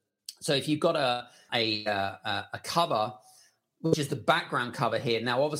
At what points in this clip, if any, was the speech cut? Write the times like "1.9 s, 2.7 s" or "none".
1.5 s